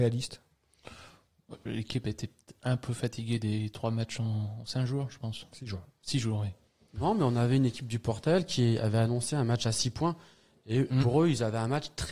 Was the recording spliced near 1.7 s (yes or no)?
yes